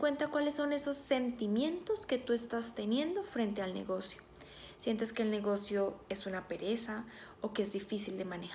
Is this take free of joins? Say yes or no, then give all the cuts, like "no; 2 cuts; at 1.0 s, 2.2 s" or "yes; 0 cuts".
yes; 0 cuts